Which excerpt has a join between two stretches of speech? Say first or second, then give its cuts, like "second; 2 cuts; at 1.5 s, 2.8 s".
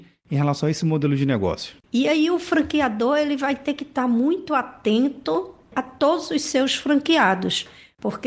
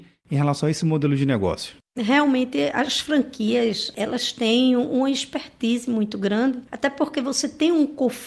first; 1 cut; at 1.8 s